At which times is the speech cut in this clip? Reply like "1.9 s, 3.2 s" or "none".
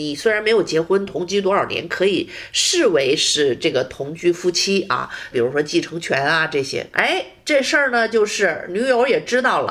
5.3 s, 6.9 s